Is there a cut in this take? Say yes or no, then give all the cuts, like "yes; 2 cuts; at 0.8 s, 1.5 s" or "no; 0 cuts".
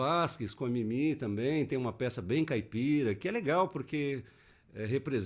no; 0 cuts